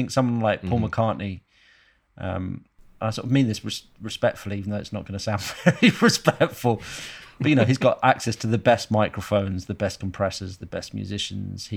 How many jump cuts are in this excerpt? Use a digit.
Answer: 1